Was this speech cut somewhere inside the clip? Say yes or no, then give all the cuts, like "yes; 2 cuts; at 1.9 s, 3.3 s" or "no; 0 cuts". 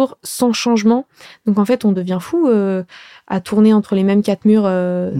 no; 0 cuts